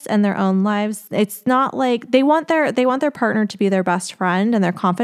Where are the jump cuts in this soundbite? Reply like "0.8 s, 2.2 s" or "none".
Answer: 1.1 s